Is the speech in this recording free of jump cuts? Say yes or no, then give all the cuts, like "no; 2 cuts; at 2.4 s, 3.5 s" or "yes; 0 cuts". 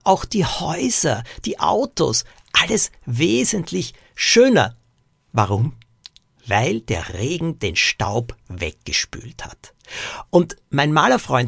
yes; 0 cuts